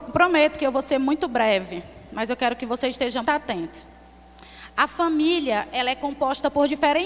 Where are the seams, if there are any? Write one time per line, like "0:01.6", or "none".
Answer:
0:03.2